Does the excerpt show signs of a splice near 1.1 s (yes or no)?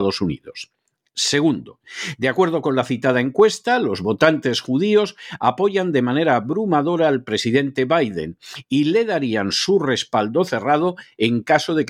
no